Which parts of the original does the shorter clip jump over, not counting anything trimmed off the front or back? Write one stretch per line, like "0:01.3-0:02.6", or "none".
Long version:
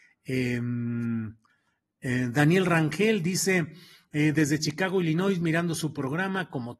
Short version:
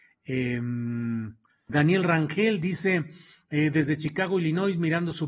0:01.7-0:02.3